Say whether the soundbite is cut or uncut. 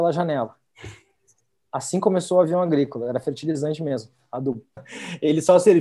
cut